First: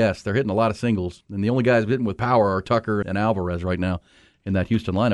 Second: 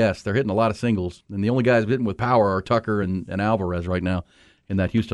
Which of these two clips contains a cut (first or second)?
first